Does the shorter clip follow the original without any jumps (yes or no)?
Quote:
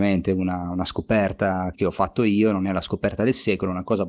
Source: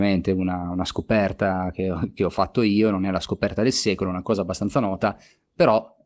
no